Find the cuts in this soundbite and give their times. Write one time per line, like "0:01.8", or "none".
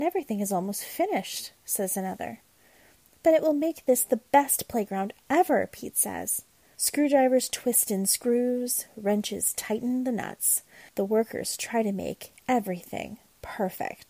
0:06.8
0:10.9